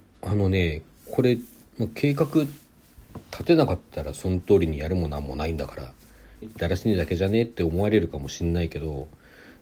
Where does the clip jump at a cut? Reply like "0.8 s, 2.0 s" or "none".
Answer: 6.4 s